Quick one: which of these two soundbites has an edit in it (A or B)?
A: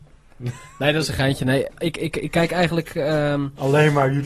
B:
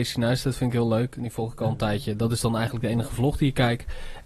A